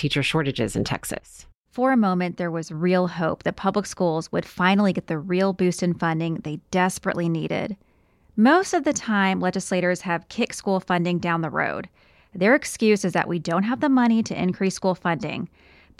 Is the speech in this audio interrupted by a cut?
no; 0 cuts

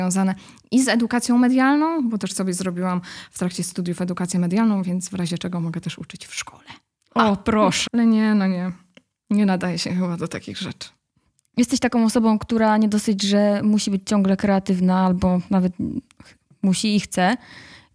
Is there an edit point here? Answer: yes; 1 cut; at 7.9 s

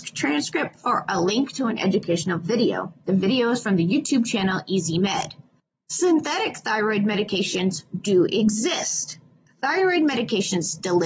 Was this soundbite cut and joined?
no; 0 cuts

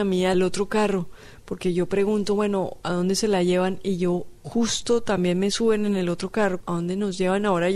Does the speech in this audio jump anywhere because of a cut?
yes; 1 cut; at 6.6 s

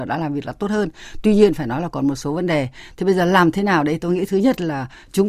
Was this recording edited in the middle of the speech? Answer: no; 0 cuts

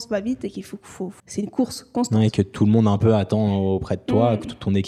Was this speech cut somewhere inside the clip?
yes; 1 cut; at 1.2 s

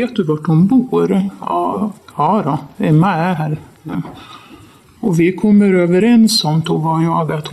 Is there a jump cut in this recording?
no; 0 cuts

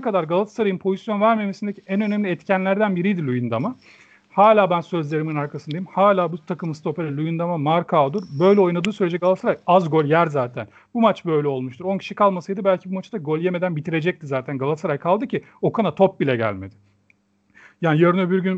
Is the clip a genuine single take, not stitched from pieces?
yes; 0 cuts

